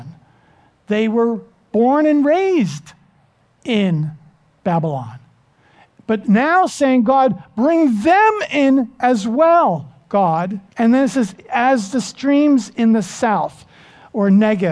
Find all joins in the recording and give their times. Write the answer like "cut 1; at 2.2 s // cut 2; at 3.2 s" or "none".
cut 1; at 10.7 s